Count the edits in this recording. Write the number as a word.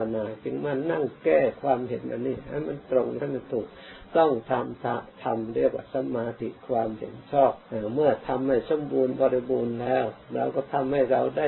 two